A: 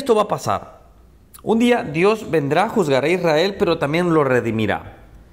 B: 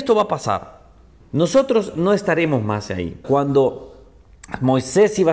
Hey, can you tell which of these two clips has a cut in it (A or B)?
B